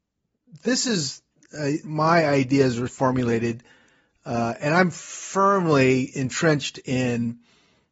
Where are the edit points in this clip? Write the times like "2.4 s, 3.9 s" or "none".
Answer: 1.8 s, 2.9 s

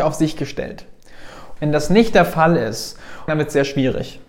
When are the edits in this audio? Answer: 1.6 s, 3.3 s

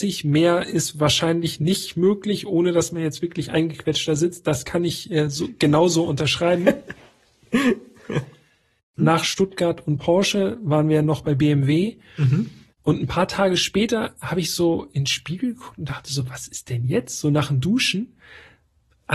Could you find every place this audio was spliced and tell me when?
9.0 s, 12.7 s

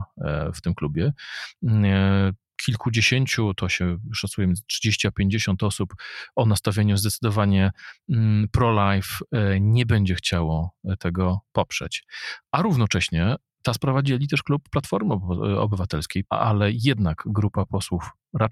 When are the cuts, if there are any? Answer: 16.2 s

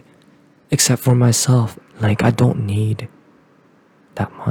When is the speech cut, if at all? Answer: 1.8 s

